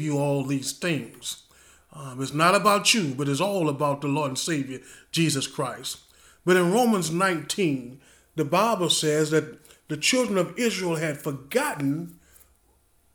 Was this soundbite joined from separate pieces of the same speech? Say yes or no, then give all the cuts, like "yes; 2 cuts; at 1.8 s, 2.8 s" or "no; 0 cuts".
no; 0 cuts